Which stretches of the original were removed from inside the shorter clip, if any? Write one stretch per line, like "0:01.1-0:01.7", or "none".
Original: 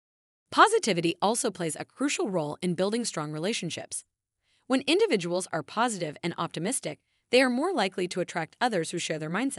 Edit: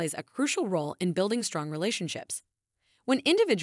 none